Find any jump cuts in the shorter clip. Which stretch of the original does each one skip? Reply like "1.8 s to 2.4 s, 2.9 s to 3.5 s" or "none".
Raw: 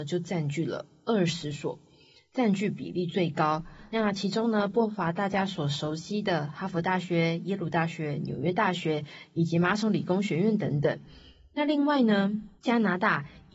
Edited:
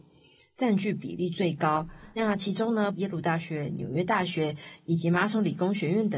4.7 s to 7.4 s